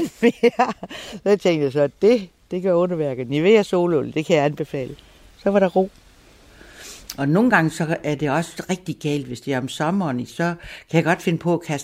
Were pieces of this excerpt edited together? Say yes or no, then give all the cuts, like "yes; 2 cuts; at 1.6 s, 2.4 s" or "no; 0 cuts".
no; 0 cuts